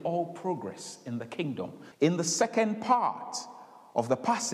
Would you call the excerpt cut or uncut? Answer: cut